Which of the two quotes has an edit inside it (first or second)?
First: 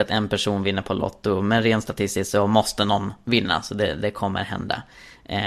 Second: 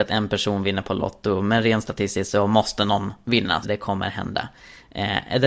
second